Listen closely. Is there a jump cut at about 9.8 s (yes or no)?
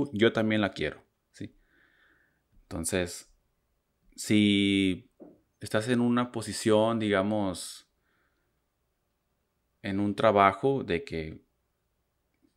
no